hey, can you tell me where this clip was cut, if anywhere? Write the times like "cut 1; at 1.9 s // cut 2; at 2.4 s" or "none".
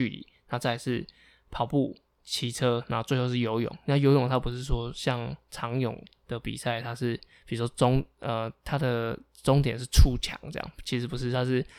none